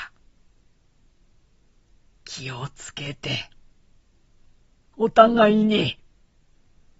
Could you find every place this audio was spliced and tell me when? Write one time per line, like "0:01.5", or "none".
none